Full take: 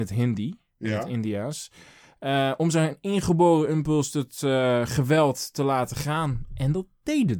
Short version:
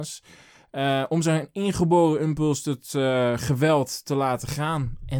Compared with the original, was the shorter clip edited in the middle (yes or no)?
no